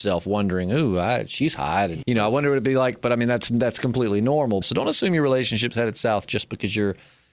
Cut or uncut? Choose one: cut